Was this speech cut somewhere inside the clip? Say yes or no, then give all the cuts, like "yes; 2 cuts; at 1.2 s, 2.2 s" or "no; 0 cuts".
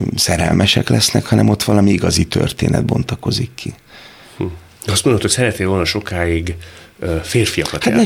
no; 0 cuts